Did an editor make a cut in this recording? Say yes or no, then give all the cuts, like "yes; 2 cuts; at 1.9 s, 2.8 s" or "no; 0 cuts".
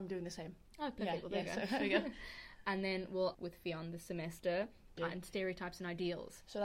yes; 2 cuts; at 3.3 s, 5.0 s